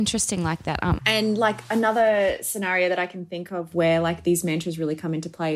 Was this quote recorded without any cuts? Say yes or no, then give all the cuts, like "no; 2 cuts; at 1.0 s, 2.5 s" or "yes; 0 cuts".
no; 1 cut; at 1.0 s